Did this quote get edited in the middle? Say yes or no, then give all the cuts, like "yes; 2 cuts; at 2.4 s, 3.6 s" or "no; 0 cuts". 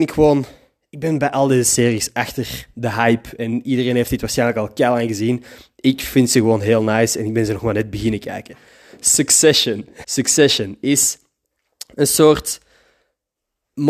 yes; 1 cut; at 10.0 s